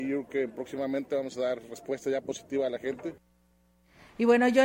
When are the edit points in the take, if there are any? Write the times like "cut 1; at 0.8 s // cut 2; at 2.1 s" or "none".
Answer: none